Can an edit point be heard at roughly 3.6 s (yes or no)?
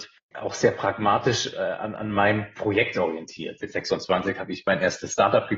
yes